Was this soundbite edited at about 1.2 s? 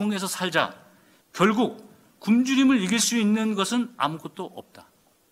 yes; 1 cut; at 1.2 s

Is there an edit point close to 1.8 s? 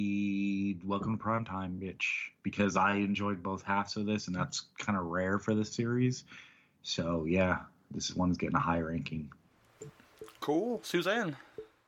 no; 0 cuts

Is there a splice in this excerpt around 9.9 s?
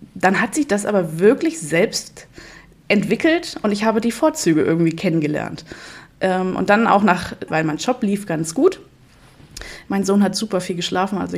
yes; 2 cuts; at 7.5 s, 9.9 s

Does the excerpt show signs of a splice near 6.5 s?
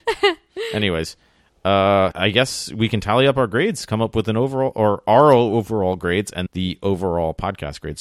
yes; 2 cuts; at 2.1 s, 6.5 s

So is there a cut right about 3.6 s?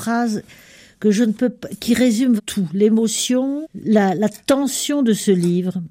yes; 2 cuts; at 2.4 s, 3.6 s

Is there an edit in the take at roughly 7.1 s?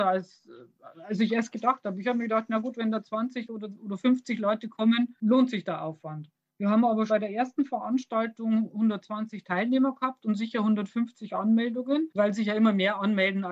yes; 1 cut; at 7.1 s

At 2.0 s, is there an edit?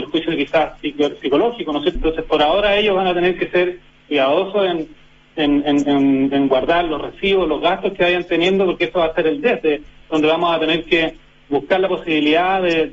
yes; 1 cut; at 2.0 s

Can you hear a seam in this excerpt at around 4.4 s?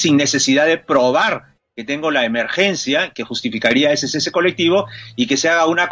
no; 0 cuts

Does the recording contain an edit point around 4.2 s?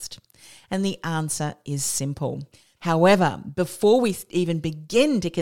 no; 1 cut; at 2.8 s

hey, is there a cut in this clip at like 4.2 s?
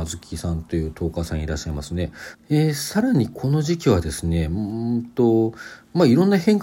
no; 1 cut; at 2.3 s

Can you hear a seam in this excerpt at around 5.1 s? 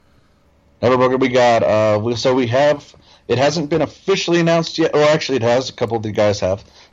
no; 0 cuts

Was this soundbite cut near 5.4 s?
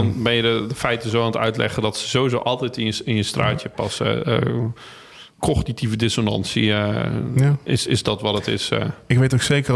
yes; 1 cut; at 5.4 s

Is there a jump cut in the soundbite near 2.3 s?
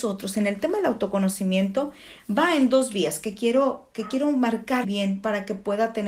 no; 1 cut; at 4.8 s

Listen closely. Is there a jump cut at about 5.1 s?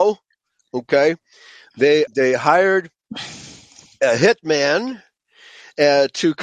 no; 1 cut; at 2.1 s

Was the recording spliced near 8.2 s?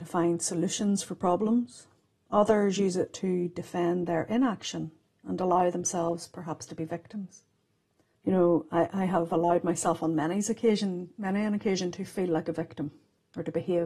yes; 1 cut; at 8.2 s

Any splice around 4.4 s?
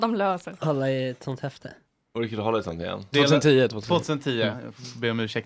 no; 1 cut; at 3.1 s

